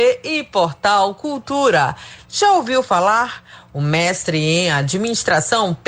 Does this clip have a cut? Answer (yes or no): yes